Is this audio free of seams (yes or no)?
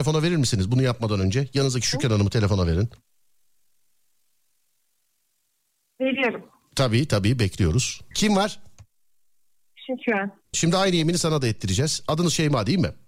no